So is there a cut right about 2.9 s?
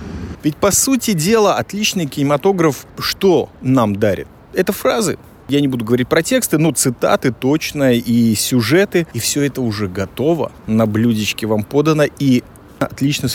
yes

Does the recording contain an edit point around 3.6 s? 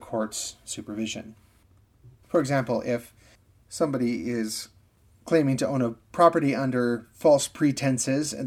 no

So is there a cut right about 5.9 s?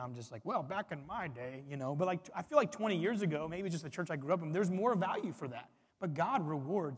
yes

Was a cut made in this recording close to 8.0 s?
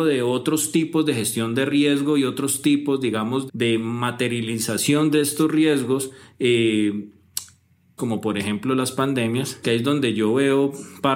yes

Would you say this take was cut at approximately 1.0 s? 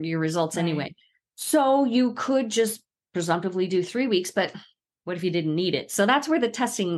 no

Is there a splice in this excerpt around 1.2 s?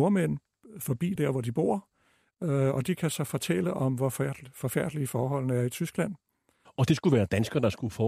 yes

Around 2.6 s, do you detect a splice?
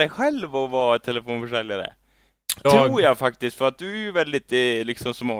yes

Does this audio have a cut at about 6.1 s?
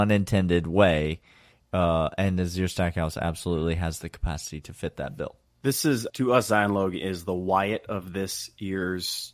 yes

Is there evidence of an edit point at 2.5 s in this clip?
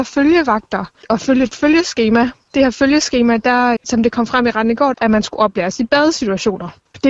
no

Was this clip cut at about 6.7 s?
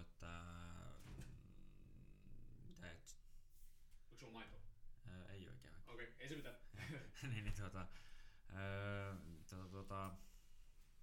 no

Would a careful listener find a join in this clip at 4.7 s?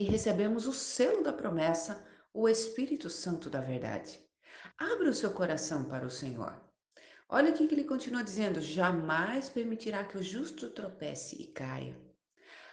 yes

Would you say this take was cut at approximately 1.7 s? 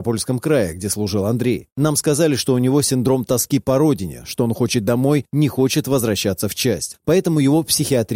yes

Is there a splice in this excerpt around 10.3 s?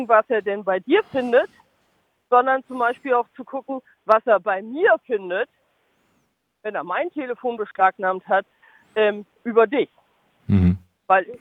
no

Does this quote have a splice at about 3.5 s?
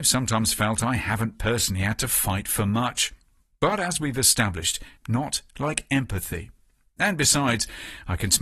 no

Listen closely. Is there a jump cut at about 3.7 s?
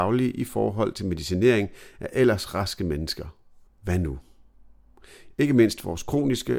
yes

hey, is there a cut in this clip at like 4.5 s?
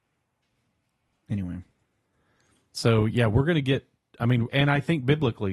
yes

